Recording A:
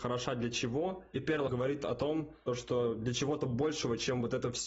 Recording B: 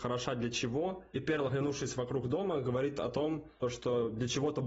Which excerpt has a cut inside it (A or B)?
A